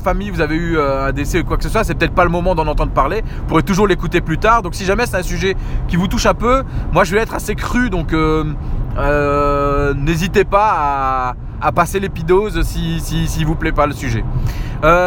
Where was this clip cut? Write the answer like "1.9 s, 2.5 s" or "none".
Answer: 11.6 s